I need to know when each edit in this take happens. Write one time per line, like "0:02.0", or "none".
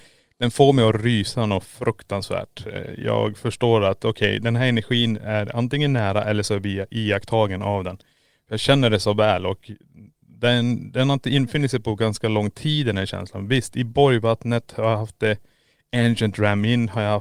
none